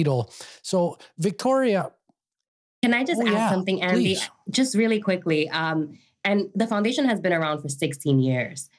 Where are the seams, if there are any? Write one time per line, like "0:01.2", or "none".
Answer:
none